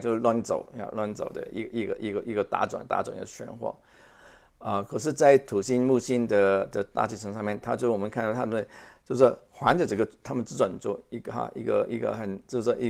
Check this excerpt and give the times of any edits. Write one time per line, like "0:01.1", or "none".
none